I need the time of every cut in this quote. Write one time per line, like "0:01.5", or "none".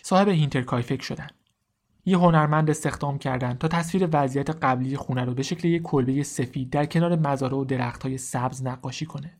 0:01.9